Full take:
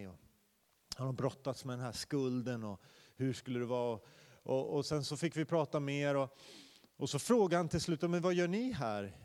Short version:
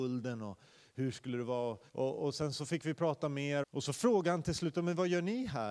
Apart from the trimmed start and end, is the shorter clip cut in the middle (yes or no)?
yes